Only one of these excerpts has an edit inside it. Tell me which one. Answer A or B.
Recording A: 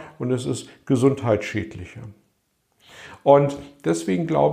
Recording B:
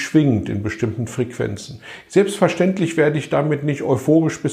B